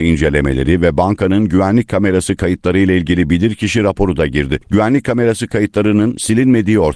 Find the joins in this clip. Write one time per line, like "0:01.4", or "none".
0:04.6